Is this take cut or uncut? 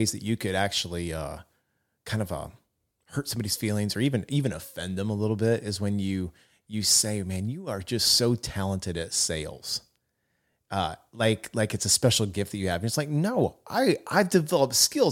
uncut